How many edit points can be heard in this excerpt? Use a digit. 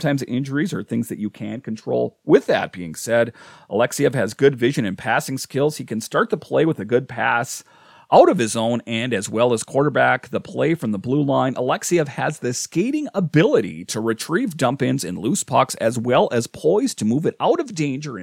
0